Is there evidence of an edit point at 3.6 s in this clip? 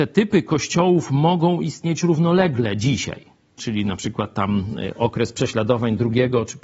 yes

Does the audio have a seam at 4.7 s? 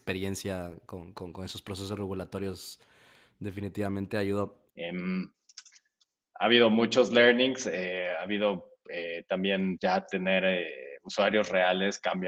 yes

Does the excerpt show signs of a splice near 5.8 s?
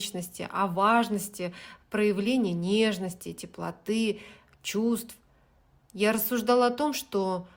no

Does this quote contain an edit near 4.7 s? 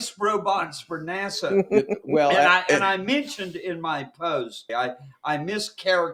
yes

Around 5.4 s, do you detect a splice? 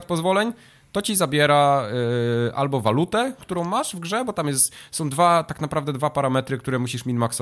no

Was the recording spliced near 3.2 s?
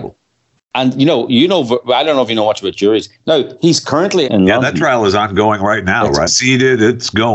yes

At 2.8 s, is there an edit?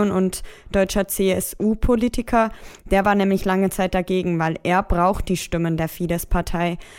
no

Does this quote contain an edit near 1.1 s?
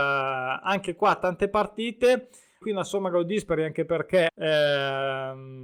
no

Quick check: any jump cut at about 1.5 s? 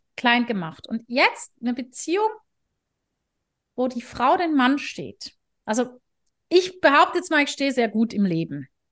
yes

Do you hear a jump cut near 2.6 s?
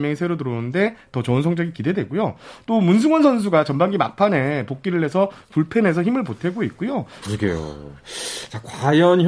no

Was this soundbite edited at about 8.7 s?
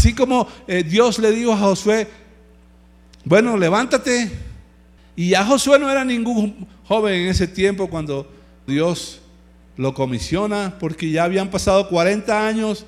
yes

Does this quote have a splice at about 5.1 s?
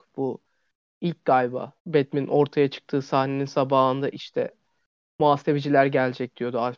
no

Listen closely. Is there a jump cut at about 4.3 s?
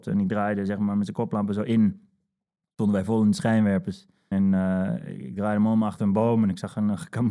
yes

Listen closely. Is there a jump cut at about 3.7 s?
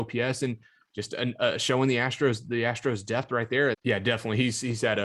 yes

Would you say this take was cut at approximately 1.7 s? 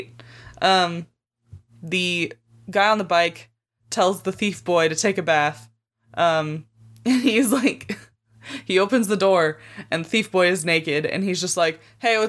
yes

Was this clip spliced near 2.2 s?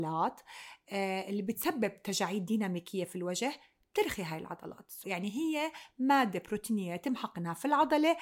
no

